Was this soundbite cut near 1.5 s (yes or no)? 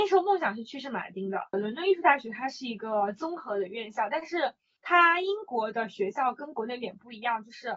yes